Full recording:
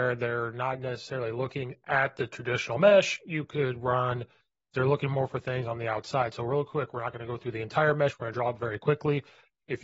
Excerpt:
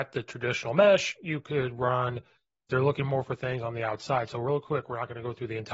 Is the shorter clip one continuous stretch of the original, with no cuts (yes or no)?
yes